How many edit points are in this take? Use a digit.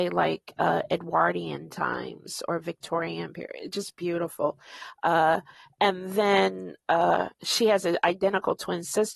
0